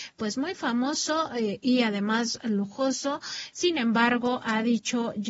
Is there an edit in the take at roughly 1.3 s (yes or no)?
no